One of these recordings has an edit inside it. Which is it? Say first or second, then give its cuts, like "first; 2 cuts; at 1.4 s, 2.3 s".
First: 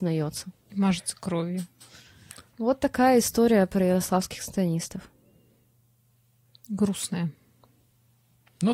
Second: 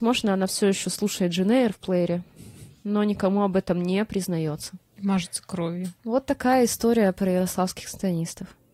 second; 1 cut; at 6.0 s